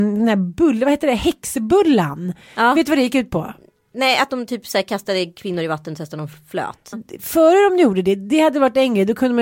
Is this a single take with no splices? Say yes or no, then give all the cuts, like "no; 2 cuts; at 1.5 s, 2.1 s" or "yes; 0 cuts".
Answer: no; 1 cut; at 6.9 s